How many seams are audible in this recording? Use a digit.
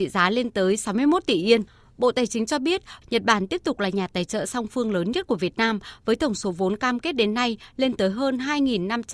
1